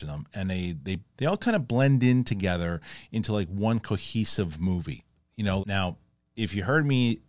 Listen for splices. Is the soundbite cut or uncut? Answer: cut